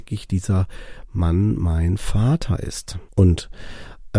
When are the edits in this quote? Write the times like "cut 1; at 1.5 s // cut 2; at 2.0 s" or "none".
cut 1; at 3.1 s